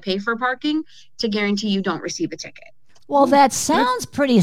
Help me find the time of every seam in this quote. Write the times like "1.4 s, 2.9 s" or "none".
none